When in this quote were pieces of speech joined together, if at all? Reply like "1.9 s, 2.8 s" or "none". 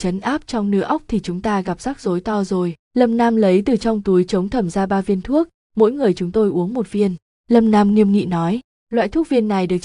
2.8 s